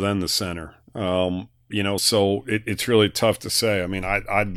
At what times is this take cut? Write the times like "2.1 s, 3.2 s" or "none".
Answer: none